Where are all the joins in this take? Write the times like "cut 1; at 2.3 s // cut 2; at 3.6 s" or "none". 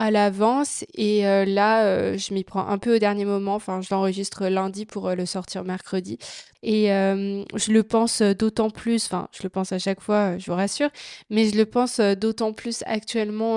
cut 1; at 6.5 s